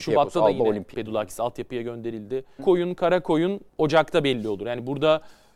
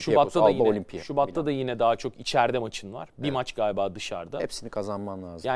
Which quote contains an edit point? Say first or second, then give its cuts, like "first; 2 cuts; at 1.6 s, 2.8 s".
first; 3 cuts; at 0.9 s, 2.6 s, 3.7 s